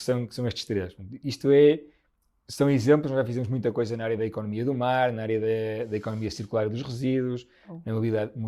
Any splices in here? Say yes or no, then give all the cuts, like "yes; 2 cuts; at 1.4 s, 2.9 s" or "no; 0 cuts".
no; 0 cuts